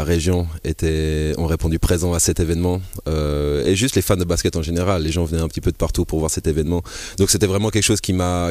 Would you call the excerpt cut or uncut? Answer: uncut